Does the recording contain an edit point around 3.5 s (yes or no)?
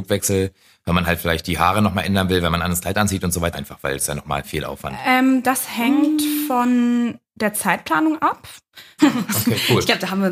yes